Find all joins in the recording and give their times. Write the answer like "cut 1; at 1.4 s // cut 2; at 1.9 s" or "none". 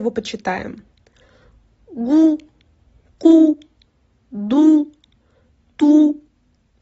none